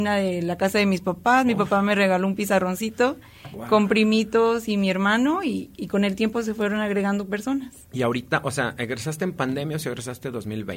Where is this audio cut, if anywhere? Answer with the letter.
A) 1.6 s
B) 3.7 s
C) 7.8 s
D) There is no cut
C